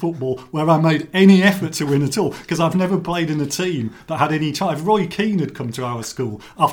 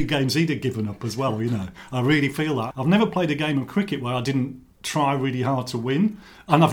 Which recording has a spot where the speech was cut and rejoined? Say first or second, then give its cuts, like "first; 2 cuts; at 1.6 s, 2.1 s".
second; 1 cut; at 2.7 s